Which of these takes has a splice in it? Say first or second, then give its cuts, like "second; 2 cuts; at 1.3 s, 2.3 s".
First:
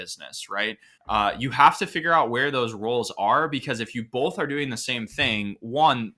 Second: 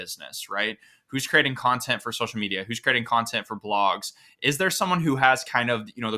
first; 1 cut; at 1.0 s